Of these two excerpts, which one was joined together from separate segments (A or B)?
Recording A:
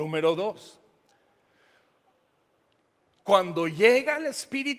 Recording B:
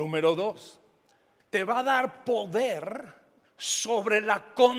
B